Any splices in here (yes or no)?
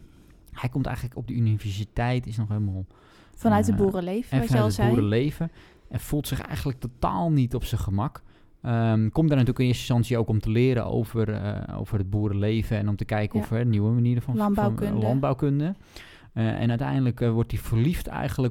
no